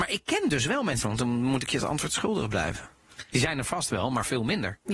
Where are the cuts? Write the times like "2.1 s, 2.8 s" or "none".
1.0 s